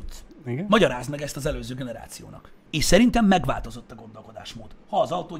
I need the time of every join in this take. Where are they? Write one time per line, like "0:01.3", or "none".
0:02.7